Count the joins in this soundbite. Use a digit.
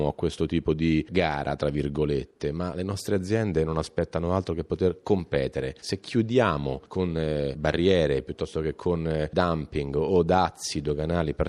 1